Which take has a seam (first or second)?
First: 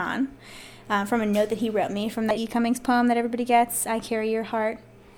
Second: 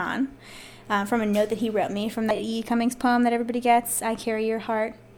first